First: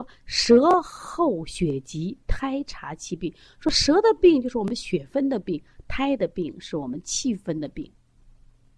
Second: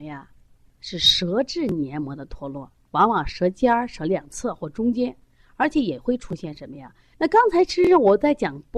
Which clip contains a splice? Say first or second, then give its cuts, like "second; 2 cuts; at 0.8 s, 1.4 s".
second; 2 cuts; at 2.9 s, 7.1 s